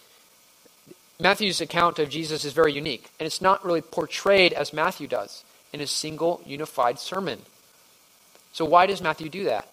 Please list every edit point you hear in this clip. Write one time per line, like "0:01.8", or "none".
0:03.1